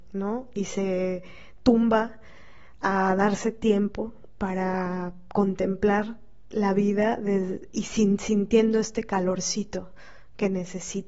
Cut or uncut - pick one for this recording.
uncut